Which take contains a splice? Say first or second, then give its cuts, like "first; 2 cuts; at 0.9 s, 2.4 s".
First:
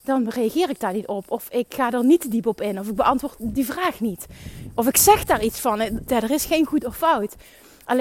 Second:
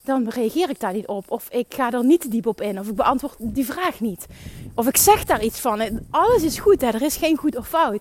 first; 1 cut; at 6.1 s